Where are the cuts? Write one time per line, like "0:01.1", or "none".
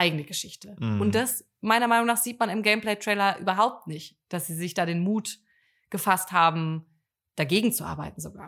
none